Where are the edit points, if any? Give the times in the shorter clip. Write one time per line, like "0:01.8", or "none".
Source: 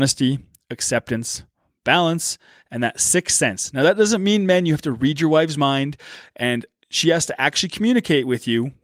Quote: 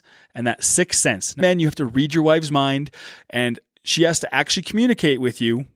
0:01.4

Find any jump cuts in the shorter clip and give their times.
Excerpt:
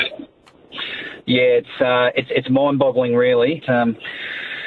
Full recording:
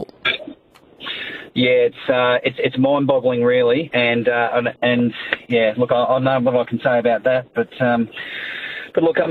0:03.6

